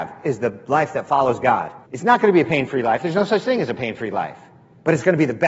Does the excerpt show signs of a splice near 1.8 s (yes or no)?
yes